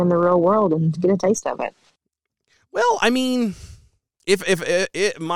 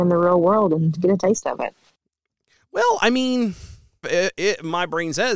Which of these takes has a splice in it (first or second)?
second